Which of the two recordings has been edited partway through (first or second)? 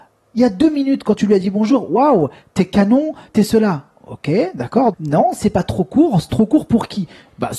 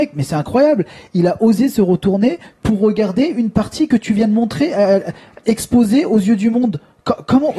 first